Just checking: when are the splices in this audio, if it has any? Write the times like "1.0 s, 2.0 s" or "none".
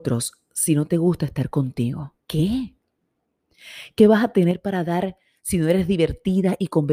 2.2 s